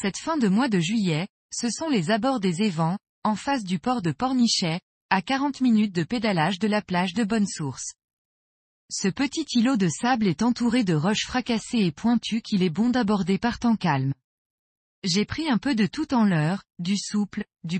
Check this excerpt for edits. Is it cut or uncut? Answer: cut